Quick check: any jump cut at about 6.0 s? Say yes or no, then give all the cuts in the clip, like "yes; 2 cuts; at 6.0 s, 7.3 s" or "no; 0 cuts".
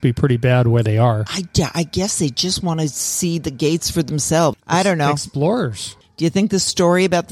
yes; 2 cuts; at 4.5 s, 6.0 s